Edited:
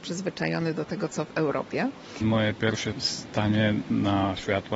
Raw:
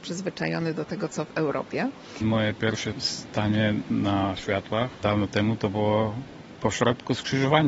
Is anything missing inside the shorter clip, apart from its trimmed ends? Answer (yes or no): no